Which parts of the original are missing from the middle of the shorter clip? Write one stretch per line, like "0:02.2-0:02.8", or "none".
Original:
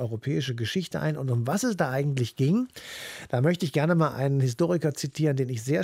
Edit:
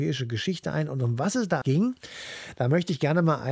0:01.9-0:02.3